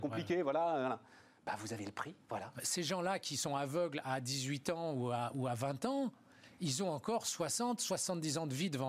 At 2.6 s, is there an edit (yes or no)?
yes